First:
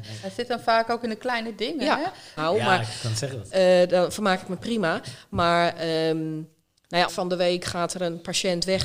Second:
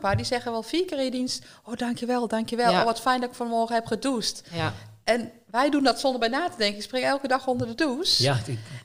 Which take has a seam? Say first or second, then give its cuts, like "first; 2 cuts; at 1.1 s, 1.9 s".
first; 2 cuts; at 2.4 s, 7.1 s